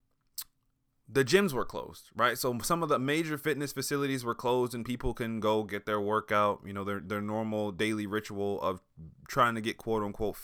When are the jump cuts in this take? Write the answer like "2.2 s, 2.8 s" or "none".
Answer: none